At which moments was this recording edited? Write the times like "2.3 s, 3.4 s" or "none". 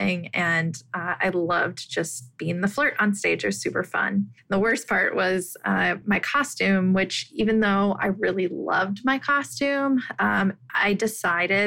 none